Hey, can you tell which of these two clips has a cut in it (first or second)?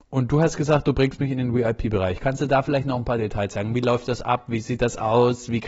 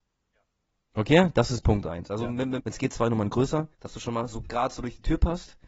second